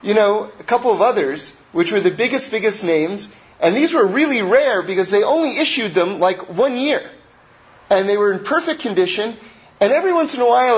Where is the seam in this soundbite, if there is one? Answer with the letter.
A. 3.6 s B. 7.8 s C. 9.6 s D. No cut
D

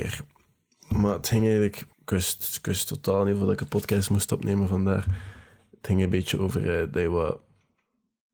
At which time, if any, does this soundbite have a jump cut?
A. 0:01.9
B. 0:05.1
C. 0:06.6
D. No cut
A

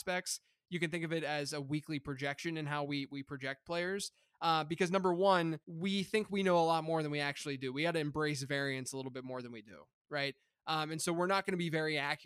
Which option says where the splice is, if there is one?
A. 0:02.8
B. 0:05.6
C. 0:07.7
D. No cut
B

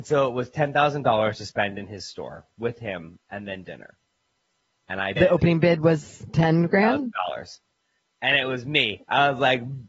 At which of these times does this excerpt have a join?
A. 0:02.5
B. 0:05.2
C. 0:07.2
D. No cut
B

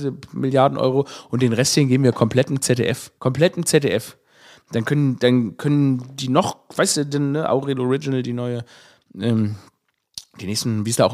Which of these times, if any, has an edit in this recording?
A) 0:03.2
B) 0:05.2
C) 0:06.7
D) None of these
A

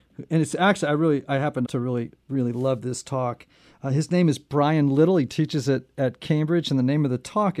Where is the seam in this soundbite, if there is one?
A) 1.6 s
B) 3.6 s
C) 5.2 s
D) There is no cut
A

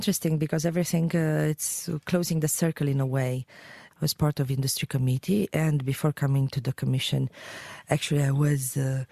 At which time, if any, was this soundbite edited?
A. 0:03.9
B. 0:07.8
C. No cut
A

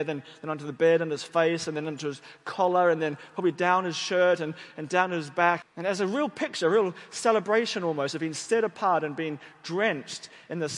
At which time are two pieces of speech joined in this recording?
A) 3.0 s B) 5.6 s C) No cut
B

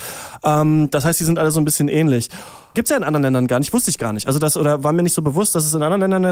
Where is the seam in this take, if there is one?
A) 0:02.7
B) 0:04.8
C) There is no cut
A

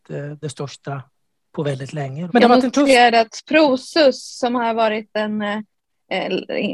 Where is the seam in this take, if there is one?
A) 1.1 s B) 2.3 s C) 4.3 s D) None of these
B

